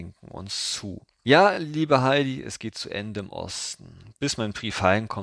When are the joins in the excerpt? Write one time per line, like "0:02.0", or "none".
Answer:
none